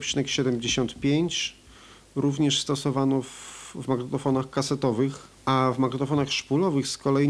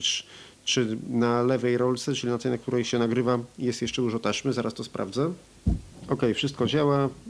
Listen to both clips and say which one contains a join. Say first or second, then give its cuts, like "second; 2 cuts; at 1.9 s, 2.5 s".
first; 1 cut; at 5.4 s